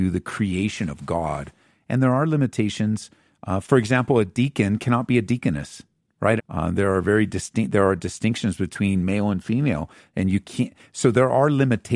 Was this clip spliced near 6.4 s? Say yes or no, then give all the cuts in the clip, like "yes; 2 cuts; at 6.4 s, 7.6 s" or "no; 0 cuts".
yes; 1 cut; at 6.4 s